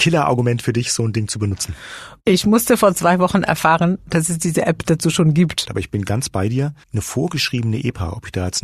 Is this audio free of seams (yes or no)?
no